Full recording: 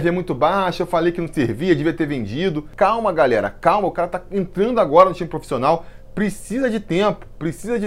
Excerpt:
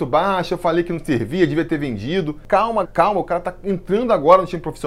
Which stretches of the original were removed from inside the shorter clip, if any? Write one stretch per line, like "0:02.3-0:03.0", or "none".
0:03.1-0:03.5